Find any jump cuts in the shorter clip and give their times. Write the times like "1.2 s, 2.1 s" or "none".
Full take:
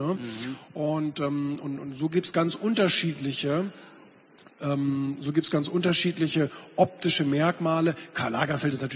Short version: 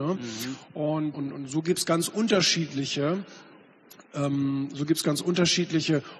1.1 s